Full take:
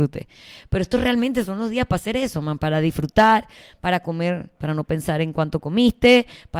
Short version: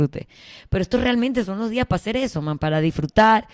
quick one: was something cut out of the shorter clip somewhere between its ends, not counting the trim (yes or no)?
no